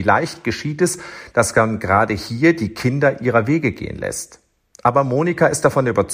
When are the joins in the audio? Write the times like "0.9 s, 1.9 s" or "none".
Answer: none